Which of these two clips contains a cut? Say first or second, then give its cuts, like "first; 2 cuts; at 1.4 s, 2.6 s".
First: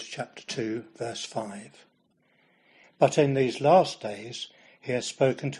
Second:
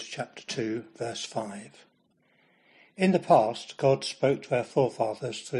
first; 1 cut; at 2.8 s